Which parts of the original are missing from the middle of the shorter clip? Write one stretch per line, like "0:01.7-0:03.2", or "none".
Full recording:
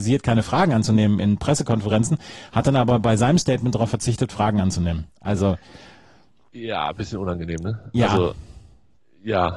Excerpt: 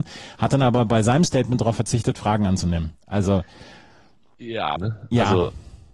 0:06.9-0:07.6